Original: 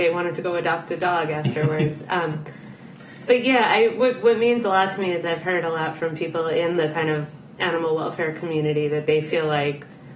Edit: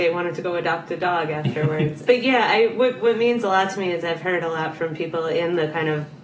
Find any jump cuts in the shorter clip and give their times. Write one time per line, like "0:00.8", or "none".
0:02.1

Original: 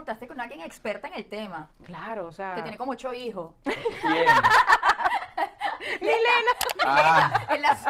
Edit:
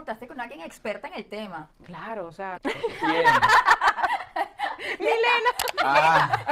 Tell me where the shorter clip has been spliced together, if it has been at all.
0:02.5

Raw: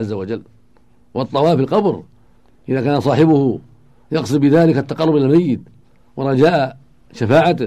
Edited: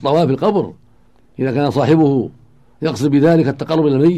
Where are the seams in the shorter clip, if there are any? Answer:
none

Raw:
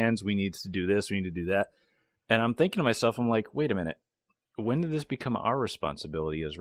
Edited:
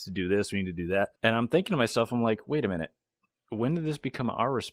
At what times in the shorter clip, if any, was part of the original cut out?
0:01.2

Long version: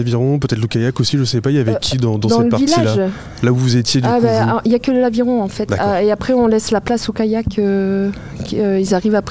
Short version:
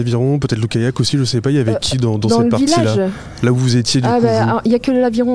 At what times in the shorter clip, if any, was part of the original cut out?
none

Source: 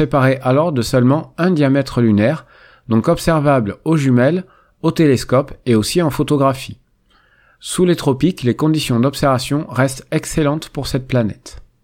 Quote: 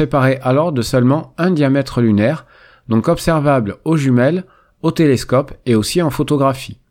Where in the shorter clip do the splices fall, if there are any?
none

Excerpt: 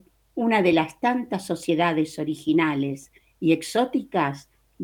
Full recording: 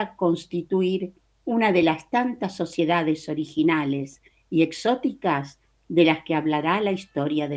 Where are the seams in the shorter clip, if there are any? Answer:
none

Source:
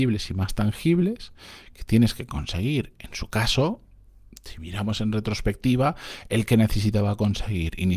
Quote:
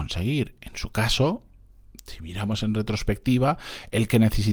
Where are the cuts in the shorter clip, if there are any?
none

